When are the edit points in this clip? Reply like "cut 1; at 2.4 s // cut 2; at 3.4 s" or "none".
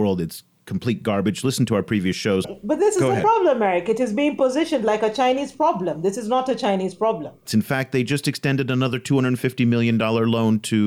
cut 1; at 2.4 s // cut 2; at 7.5 s

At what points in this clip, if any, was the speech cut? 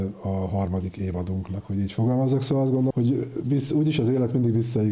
cut 1; at 2.9 s

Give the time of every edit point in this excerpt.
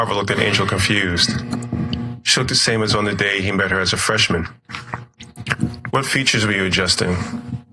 none

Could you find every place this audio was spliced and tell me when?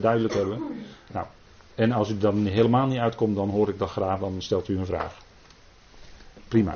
none

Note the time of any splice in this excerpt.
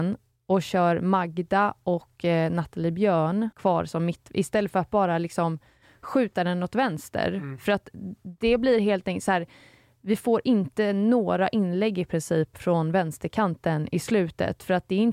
cut 1; at 3.5 s

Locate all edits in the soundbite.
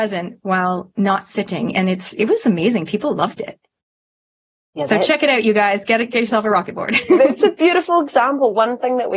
none

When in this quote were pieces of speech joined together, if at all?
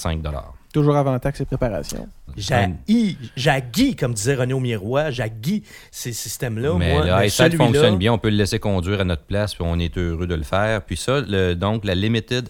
cut 1; at 2.3 s

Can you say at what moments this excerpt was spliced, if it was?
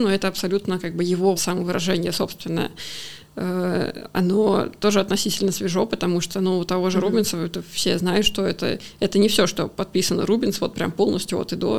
cut 1; at 1.4 s

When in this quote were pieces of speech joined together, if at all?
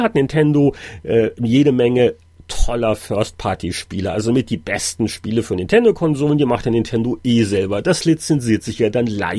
none

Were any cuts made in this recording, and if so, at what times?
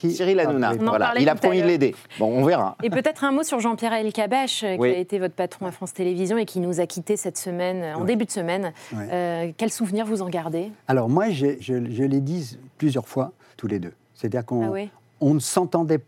cut 1; at 11.6 s // cut 2; at 13.5 s

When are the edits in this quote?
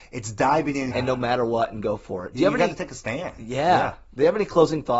cut 1; at 0.9 s

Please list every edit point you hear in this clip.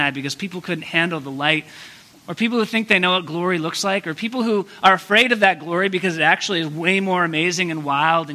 cut 1; at 2.1 s

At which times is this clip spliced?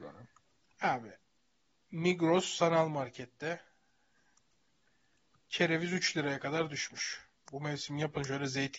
cut 1; at 7.4 s

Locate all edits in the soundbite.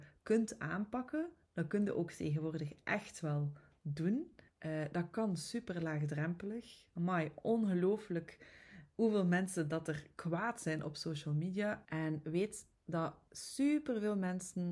cut 1; at 4.5 s // cut 2; at 11.8 s

